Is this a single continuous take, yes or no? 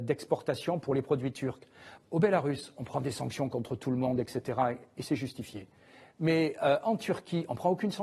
no